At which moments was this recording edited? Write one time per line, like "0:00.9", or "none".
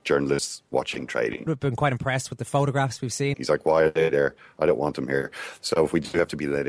0:01.5
0:03.3